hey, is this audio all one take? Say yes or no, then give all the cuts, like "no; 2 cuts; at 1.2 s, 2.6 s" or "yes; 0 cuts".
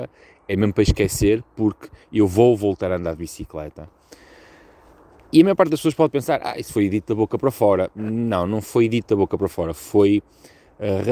yes; 0 cuts